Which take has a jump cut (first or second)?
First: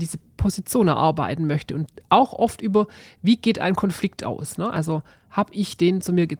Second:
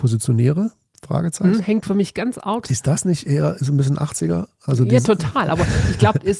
second